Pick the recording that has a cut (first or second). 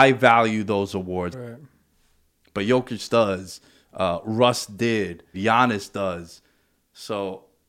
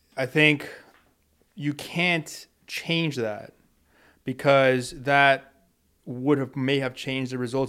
first